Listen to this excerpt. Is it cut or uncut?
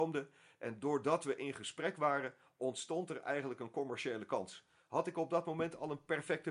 uncut